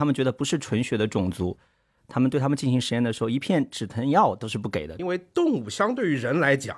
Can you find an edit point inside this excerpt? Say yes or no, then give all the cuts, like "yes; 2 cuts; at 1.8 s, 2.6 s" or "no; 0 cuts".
yes; 1 cut; at 5.0 s